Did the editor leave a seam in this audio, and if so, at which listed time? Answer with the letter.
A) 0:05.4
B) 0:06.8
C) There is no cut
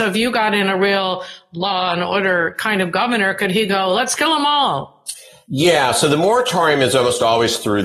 C